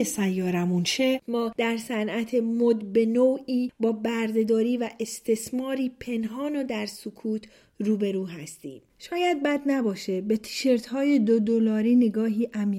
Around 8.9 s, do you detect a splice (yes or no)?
yes